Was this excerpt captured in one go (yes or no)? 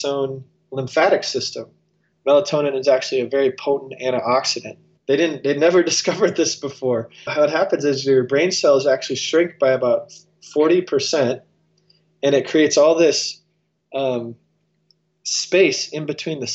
no